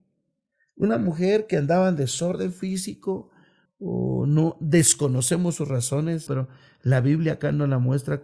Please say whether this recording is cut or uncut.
cut